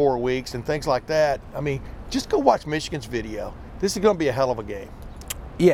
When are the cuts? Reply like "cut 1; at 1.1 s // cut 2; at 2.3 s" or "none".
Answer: none